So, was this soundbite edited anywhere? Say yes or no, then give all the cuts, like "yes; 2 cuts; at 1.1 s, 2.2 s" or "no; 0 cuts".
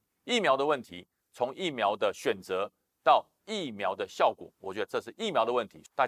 yes; 1 cut; at 1.2 s